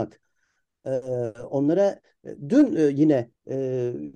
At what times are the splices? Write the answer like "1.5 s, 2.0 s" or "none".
none